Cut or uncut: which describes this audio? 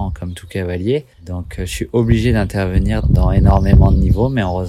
cut